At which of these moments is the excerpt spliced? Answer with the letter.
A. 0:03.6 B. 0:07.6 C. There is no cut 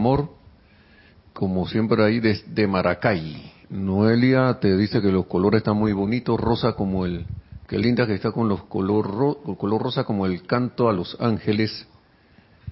A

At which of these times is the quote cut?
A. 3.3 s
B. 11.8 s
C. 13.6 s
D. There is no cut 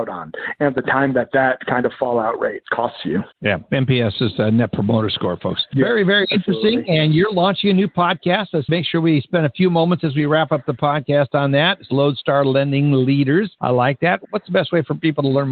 A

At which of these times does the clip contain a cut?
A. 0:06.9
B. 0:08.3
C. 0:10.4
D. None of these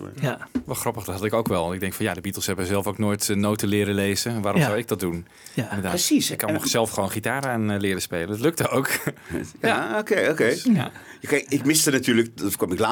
D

